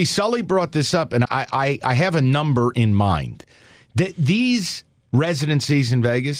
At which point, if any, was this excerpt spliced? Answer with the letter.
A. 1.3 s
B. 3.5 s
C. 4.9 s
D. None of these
A